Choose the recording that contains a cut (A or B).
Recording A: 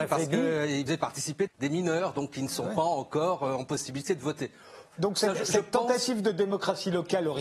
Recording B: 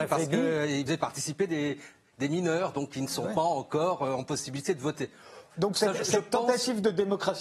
A